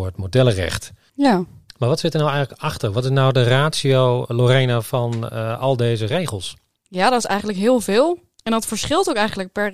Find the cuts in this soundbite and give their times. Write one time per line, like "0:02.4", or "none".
none